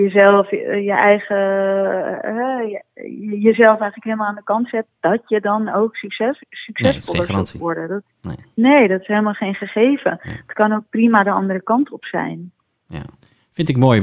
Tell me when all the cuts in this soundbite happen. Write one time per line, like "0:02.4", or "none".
none